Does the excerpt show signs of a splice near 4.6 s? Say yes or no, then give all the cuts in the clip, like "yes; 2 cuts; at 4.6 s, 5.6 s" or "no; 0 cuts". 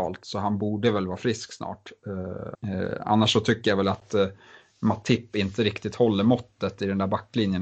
no; 1 cut; at 2.5 s